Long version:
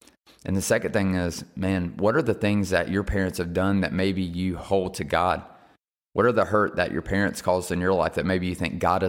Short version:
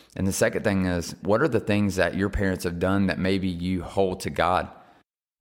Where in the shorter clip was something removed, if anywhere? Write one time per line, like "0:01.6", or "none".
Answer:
0:01.2